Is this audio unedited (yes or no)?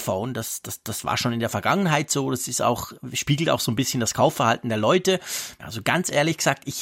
no